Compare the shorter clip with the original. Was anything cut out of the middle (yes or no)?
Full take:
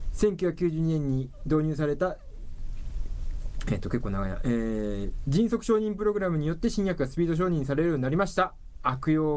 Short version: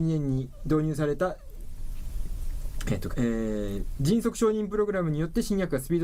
yes